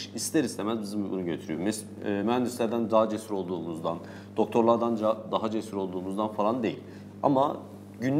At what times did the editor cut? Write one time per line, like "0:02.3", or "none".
none